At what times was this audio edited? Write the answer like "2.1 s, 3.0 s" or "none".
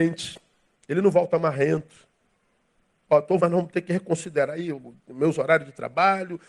3.4 s